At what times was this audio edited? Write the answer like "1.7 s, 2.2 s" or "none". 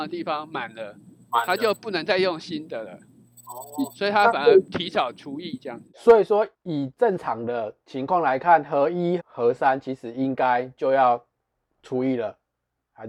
6.5 s, 9.2 s

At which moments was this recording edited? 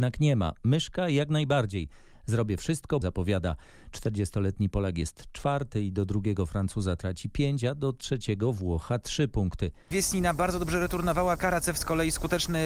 3.0 s, 9.9 s, 11.4 s

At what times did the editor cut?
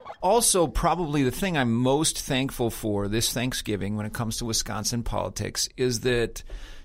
none

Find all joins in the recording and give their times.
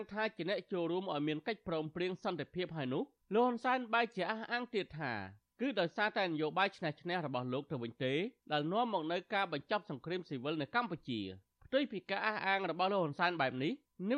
8.4 s

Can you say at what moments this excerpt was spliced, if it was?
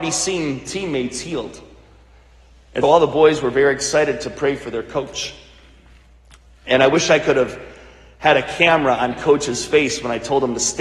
2.8 s

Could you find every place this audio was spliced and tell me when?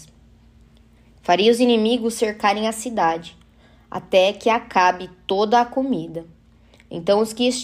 none

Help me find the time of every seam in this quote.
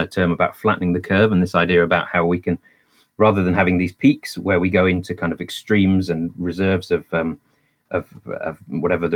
none

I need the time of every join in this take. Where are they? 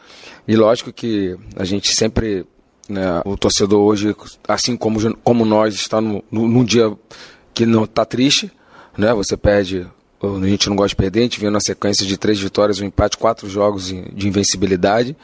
3.3 s

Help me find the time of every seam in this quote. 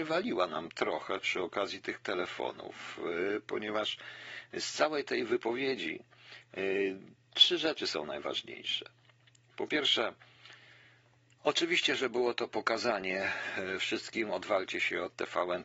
none

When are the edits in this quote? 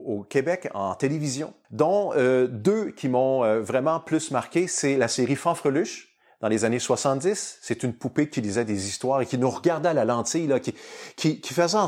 none

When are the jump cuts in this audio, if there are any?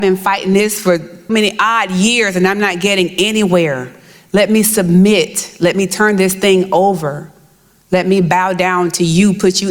1.3 s

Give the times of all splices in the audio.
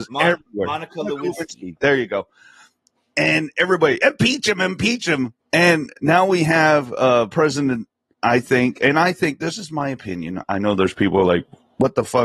5.4 s

